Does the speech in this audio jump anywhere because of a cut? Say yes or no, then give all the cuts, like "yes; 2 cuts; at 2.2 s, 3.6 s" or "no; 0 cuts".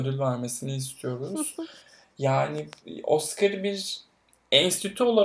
no; 0 cuts